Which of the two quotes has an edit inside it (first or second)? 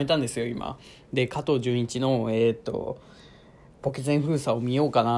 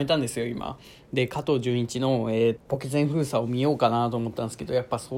second